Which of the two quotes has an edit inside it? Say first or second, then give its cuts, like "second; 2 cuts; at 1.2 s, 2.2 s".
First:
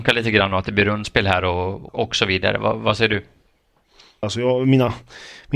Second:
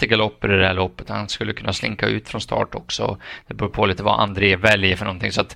first; 2 cuts; at 1.9 s, 4.2 s